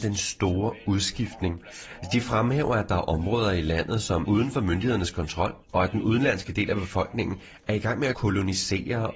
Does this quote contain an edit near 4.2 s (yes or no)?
yes